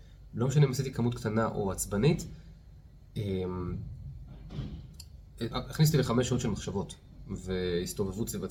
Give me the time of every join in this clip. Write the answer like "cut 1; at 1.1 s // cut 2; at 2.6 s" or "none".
cut 1; at 5.5 s